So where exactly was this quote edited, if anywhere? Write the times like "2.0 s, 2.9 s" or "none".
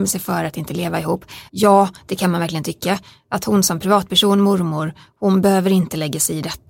1.5 s